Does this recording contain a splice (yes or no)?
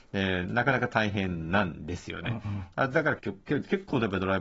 yes